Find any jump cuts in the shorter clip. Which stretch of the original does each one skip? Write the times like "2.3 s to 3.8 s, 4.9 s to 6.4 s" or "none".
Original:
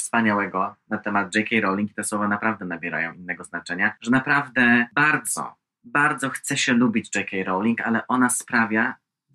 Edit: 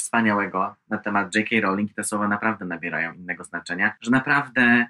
none